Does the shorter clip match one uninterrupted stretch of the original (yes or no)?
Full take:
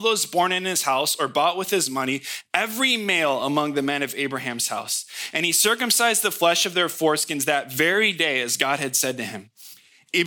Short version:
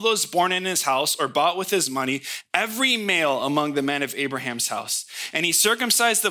yes